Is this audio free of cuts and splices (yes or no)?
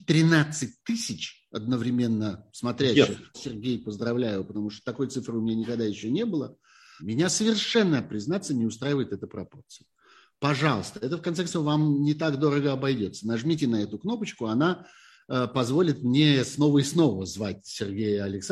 no